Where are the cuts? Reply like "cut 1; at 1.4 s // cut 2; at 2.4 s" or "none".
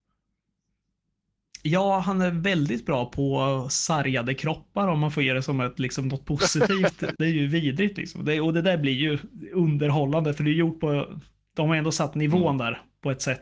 cut 1; at 7.2 s